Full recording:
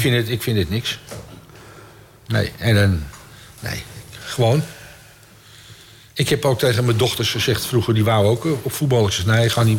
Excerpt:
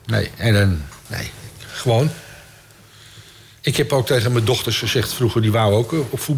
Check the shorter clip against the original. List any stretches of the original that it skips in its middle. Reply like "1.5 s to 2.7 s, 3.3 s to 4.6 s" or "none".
3.2 s to 3.5 s

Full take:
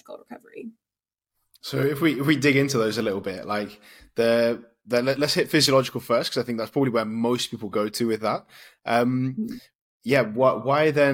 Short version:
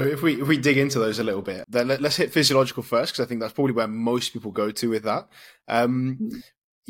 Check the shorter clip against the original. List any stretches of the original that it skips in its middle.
3.4 s to 4.8 s

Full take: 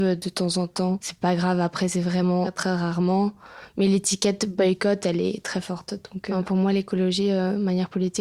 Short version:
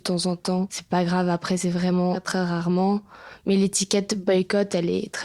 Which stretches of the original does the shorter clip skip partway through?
none

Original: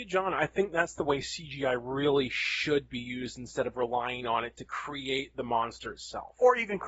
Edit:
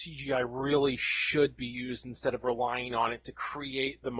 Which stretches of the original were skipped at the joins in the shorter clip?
none

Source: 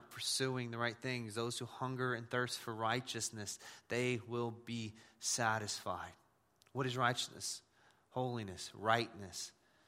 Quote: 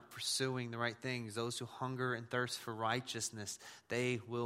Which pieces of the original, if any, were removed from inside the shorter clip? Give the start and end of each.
none

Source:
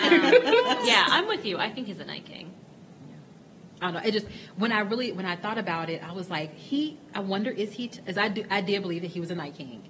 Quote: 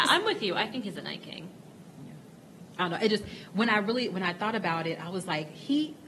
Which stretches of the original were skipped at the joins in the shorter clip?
none

